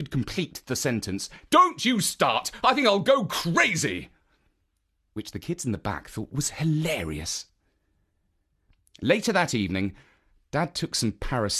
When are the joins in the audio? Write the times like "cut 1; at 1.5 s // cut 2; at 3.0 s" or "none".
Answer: cut 1; at 1.5 s